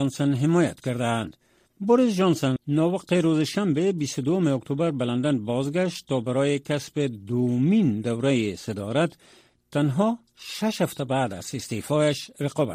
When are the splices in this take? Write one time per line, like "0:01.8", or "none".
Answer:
0:01.7

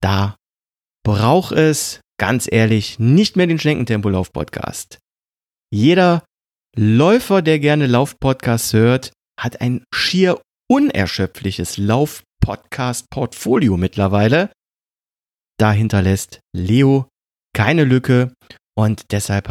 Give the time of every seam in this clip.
0:09.2

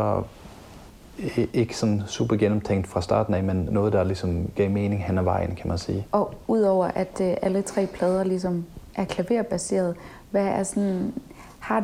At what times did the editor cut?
0:06.1

